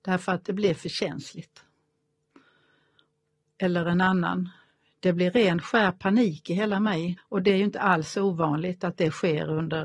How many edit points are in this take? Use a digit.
1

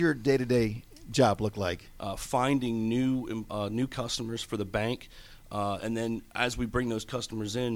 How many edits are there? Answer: 1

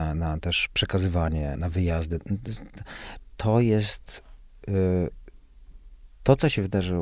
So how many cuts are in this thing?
1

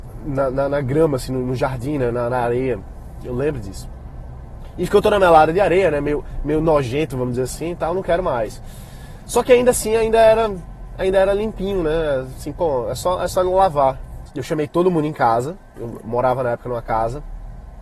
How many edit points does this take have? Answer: 1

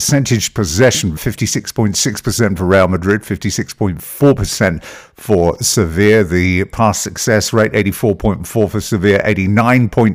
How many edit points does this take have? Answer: 1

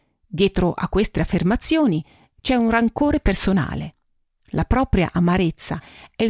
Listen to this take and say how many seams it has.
0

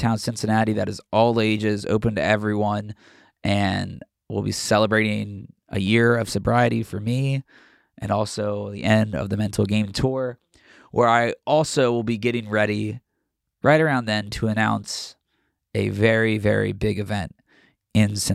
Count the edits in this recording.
0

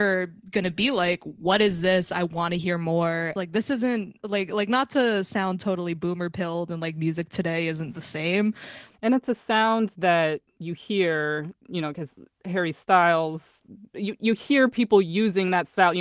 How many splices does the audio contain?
3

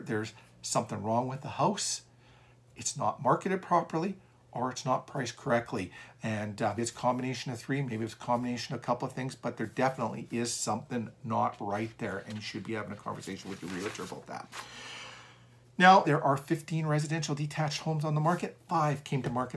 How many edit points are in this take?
2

